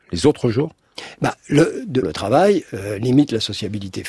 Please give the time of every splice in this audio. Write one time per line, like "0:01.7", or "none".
0:02.0